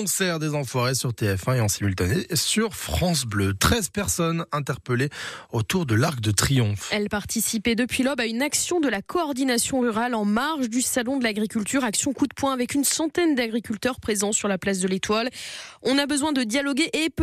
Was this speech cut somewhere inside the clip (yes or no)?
no